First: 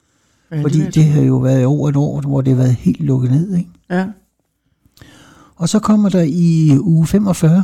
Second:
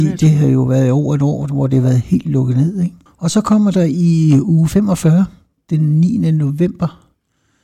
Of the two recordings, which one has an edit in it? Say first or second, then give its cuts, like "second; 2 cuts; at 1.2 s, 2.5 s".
second; 1 cut; at 3.1 s